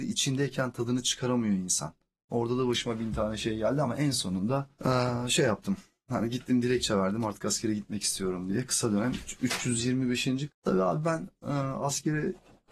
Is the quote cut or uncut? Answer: cut